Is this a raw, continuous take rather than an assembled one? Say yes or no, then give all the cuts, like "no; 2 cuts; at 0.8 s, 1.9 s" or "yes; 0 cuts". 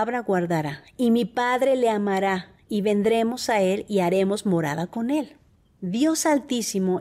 no; 1 cut; at 5.8 s